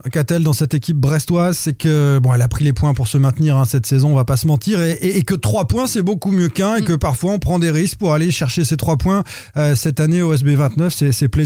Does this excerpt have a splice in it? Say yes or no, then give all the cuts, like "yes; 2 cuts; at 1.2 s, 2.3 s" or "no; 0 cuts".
no; 0 cuts